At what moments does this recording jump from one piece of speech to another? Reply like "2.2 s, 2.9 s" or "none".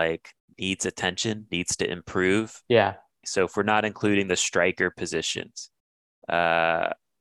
3.2 s